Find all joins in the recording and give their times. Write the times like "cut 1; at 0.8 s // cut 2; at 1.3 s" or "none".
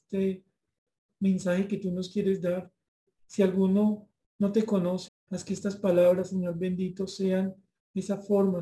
cut 1; at 5.1 s